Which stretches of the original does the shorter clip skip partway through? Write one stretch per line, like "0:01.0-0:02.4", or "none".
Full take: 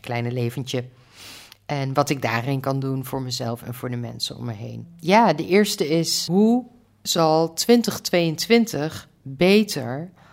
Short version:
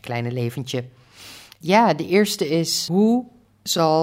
0:01.6-0:05.0